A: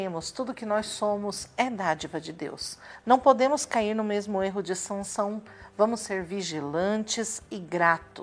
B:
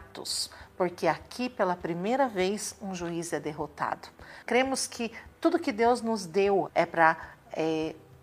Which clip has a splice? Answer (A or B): B